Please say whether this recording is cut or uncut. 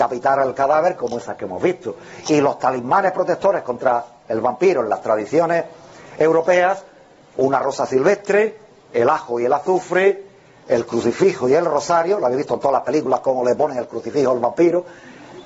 uncut